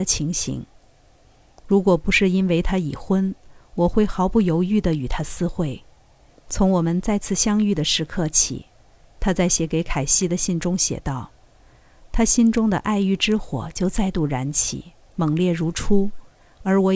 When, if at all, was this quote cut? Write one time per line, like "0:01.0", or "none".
0:06.3